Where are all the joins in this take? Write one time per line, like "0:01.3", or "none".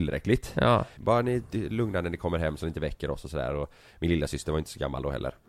0:01.0